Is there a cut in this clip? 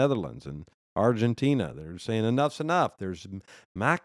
no; 0 cuts

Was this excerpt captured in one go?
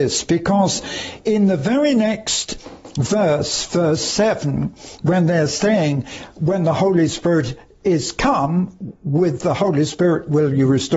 yes; 0 cuts

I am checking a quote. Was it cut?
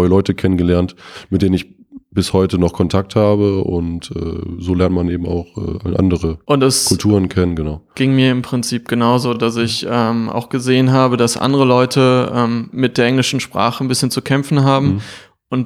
no; 0 cuts

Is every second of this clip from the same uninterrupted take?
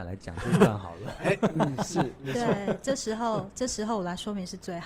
yes; 0 cuts

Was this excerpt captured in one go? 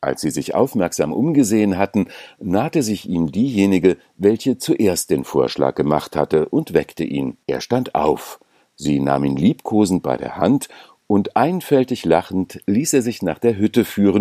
no; 1 cut; at 7.4 s

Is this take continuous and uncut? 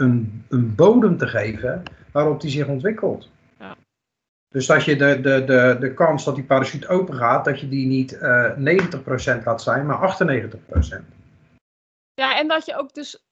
yes; 0 cuts

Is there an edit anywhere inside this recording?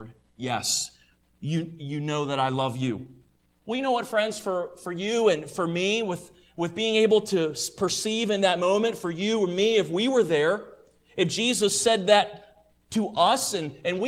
no; 0 cuts

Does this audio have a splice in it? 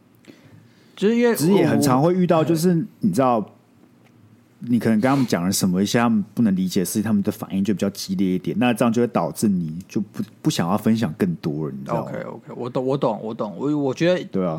no; 0 cuts

